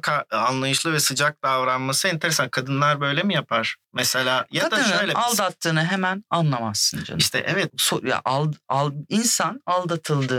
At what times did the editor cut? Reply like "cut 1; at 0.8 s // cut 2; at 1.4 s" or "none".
cut 1; at 3.8 s // cut 2; at 7.7 s